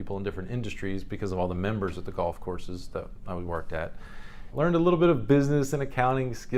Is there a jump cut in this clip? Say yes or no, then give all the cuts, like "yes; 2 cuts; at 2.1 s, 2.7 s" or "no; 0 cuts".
yes; 1 cut; at 4.5 s